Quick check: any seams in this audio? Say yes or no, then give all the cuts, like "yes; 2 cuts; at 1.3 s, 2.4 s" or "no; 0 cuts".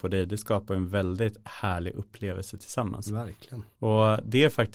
yes; 1 cut; at 3.7 s